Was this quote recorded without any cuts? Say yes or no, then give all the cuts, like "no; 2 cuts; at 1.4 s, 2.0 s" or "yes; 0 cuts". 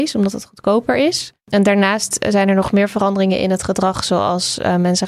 no; 1 cut; at 1.4 s